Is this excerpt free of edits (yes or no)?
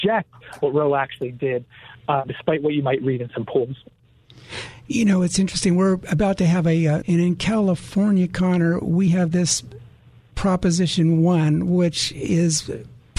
no